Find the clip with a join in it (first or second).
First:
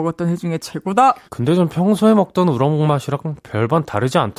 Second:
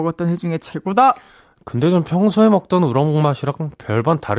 first